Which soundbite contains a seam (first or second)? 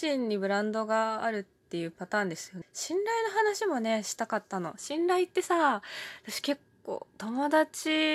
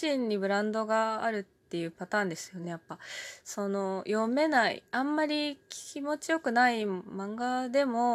first